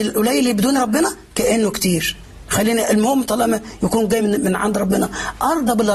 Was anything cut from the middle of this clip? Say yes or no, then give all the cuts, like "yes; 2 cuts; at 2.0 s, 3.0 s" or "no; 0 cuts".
no; 0 cuts